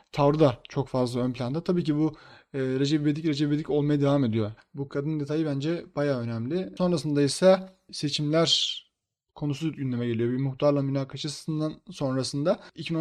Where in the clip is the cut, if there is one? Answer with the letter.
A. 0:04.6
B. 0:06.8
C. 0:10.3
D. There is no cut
A